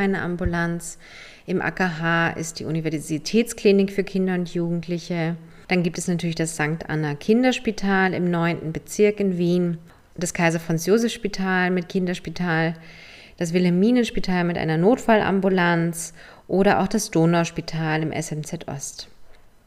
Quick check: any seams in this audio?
no; 0 cuts

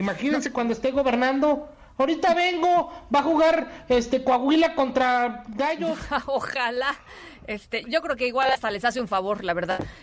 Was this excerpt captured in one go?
no; 1 cut; at 7.8 s

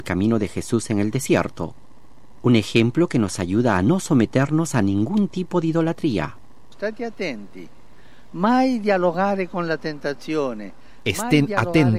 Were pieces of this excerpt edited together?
no; 0 cuts

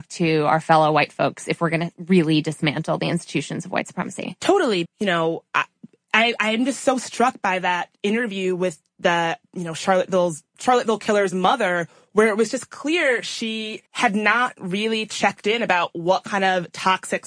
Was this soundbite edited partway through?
yes; 2 cuts; at 4.8 s, 13.9 s

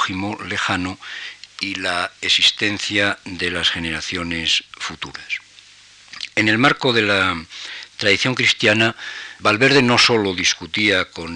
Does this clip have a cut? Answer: yes; 2 cuts; at 6.3 s, 9.4 s

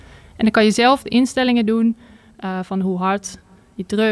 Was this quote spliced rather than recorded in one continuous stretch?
no; 0 cuts

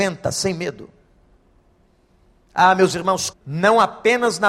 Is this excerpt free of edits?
no; 1 cut; at 3.3 s

